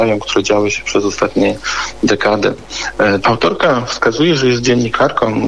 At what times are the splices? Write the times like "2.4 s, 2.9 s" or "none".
3.2 s